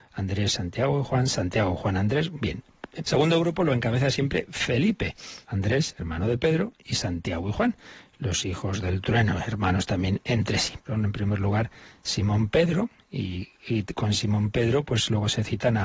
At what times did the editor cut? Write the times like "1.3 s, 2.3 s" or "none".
3.0 s, 5.4 s, 10.9 s